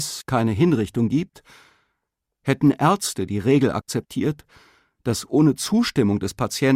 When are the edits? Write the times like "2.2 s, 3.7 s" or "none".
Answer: none